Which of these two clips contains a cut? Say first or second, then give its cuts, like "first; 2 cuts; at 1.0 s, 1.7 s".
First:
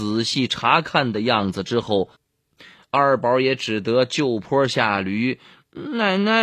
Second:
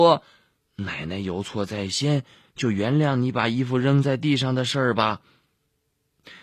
first; 1 cut; at 2.2 s